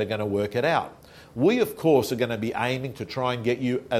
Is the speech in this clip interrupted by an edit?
no; 0 cuts

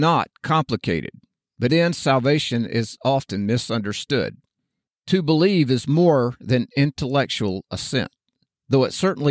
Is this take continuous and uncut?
no; 1 cut; at 1.7 s

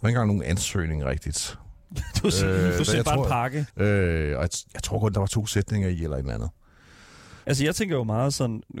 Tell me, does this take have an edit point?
yes; 2 cuts; at 3.7 s, 7.4 s

